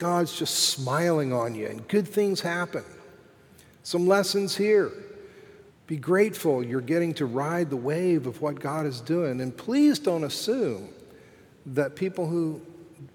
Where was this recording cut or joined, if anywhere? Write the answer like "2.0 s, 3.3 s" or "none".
5.7 s